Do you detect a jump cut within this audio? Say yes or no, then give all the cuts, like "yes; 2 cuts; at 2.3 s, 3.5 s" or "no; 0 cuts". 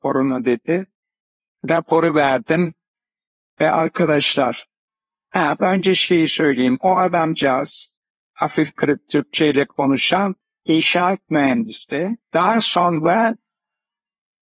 yes; 1 cut; at 12.2 s